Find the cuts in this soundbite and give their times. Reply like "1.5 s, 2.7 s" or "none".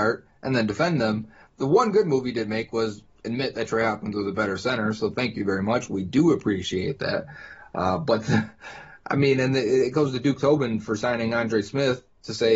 none

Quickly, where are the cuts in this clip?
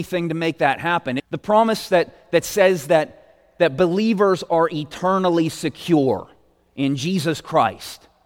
1.2 s

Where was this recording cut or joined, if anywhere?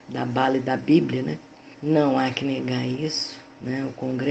1.7 s

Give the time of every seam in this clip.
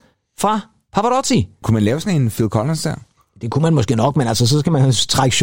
1.6 s

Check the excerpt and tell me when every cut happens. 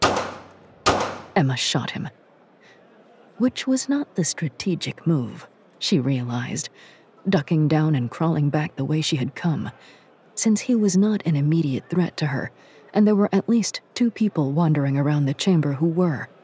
none

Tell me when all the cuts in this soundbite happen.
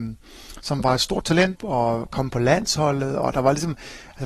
1.5 s

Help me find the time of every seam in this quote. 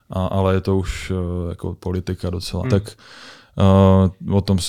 2.6 s

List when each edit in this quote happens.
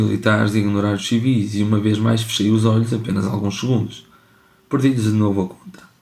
none

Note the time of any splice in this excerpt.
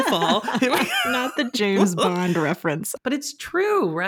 3.0 s

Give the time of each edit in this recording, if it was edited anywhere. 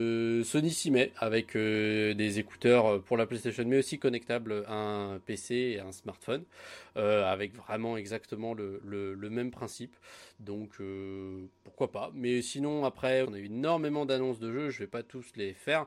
13.2 s

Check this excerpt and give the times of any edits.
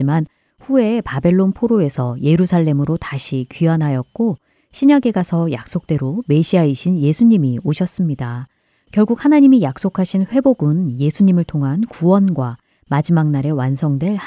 none

